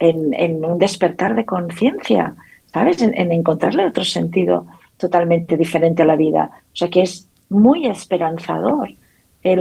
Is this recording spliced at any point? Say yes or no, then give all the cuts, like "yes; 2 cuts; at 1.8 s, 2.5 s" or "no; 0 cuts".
no; 0 cuts